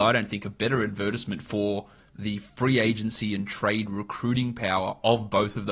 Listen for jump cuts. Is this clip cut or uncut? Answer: uncut